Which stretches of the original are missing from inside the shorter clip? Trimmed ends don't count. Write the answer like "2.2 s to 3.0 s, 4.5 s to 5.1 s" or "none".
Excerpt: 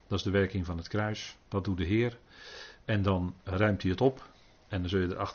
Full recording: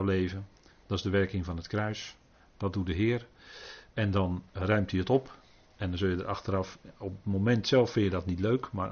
2.2 s to 2.5 s